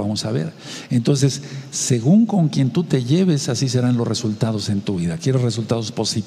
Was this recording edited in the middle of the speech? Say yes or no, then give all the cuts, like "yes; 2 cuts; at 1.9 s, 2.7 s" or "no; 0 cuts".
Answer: no; 0 cuts